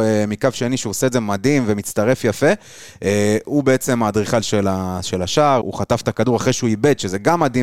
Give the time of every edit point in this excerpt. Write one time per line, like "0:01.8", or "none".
0:05.6

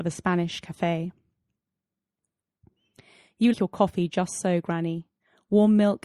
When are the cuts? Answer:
0:03.5

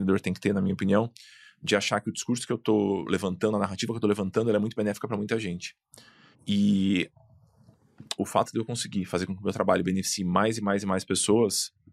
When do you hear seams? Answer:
0:06.3

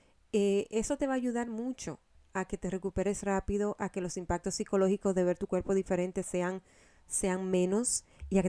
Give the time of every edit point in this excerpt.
none

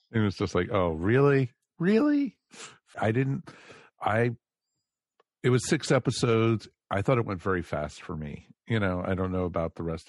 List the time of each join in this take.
0:02.9

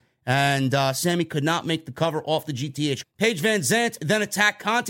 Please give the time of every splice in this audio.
0:03.0

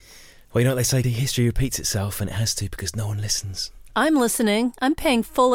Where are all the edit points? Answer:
0:01.0

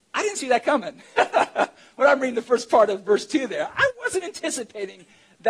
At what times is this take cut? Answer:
none

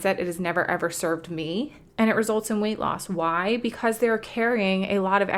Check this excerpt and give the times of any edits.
0:01.9

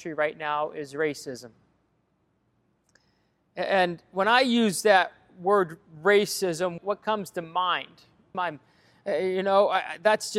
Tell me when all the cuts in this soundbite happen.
0:06.8
0:08.3

